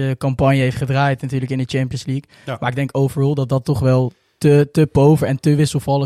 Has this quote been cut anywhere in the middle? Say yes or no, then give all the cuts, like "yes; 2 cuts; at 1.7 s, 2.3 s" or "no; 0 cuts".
no; 0 cuts